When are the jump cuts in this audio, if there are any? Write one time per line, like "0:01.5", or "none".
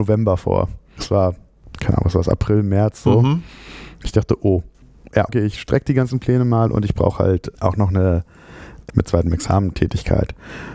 0:05.3
0:08.9